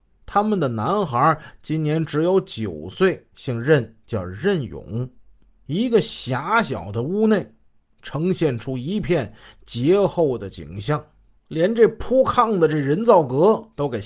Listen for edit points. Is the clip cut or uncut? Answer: uncut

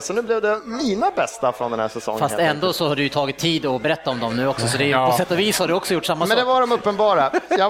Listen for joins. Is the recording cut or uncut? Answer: uncut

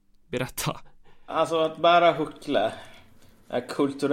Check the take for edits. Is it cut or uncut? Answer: cut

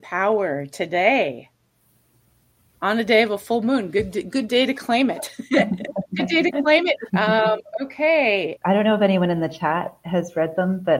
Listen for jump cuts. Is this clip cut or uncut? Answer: cut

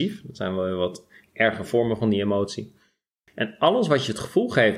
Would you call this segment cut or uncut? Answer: uncut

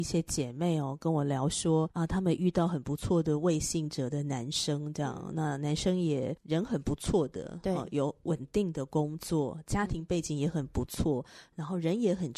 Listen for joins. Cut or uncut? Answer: uncut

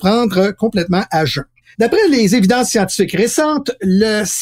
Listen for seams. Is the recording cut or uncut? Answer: cut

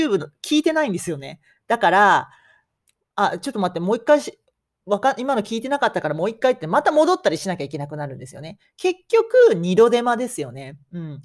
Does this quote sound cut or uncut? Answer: uncut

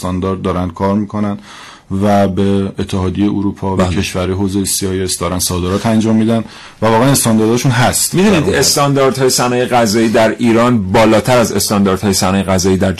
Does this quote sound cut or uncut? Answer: uncut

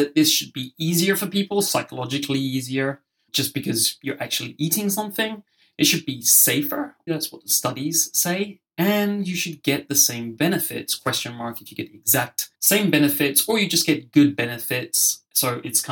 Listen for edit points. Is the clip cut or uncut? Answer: cut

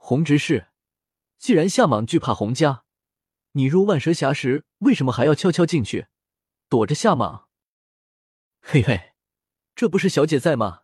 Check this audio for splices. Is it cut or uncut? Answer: uncut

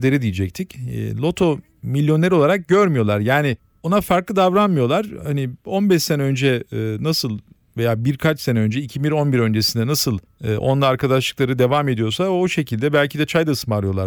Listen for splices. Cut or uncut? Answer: uncut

